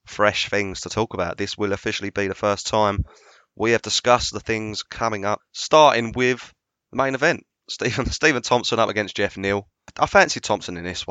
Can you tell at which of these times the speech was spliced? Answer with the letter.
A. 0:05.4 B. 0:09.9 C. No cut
A